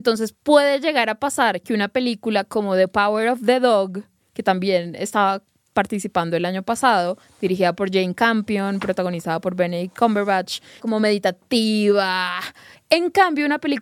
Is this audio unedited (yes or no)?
no